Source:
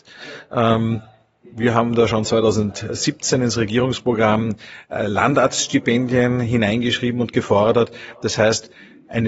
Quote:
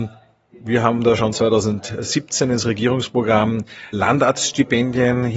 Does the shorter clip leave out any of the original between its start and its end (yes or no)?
yes